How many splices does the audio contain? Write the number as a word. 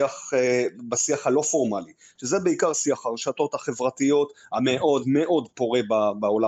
one